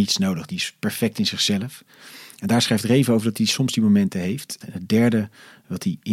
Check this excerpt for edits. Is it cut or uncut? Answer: cut